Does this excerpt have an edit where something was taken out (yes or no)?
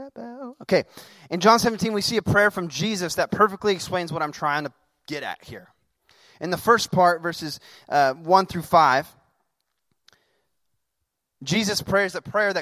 no